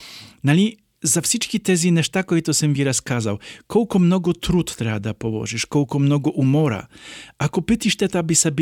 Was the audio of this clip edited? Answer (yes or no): no